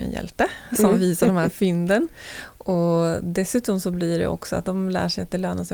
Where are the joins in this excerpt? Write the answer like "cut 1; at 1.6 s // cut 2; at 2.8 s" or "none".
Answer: cut 1; at 4.7 s